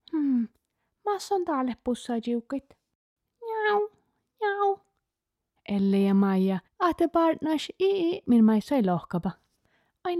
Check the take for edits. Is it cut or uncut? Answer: cut